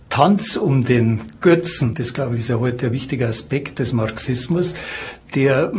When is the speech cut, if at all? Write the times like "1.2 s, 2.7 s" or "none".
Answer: 1.9 s